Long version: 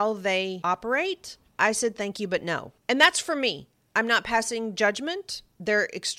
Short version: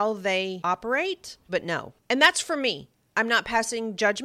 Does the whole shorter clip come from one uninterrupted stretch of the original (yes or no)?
no